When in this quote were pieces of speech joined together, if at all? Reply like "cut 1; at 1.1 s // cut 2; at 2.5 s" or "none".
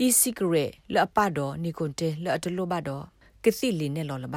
none